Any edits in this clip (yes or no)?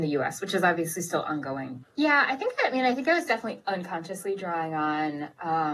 yes